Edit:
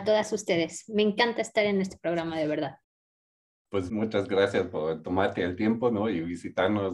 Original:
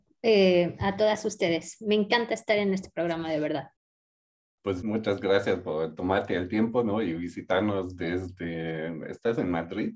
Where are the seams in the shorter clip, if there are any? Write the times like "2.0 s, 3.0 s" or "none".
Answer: none